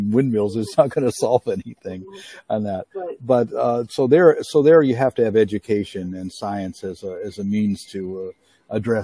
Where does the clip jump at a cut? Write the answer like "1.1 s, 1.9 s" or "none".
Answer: none

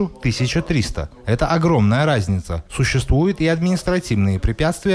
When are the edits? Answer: none

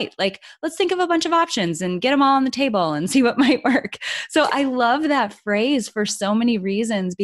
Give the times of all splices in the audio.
none

